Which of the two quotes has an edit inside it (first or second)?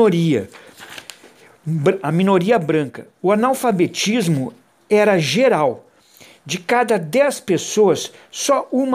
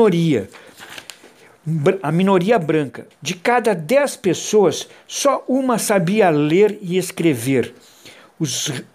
second